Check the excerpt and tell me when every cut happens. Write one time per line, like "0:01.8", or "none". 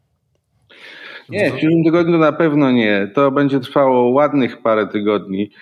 0:01.3